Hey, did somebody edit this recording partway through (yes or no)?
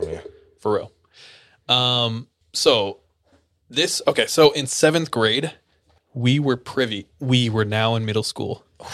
no